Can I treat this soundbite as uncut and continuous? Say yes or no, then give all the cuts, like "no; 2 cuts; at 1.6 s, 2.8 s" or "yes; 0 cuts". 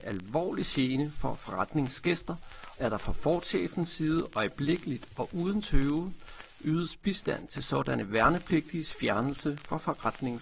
no; 1 cut; at 2.8 s